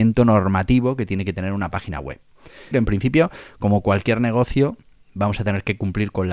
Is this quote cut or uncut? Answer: cut